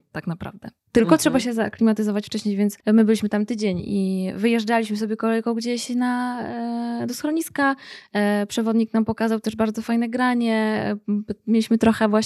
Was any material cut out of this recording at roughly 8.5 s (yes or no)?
no